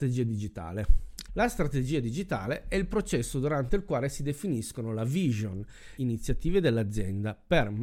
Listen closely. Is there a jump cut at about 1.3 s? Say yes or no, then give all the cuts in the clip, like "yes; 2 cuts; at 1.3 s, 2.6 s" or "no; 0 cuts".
yes; 2 cuts; at 1.3 s, 6.0 s